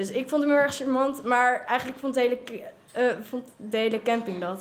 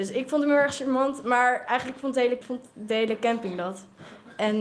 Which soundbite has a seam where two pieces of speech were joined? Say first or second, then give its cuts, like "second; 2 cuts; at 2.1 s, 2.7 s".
second; 1 cut; at 2.4 s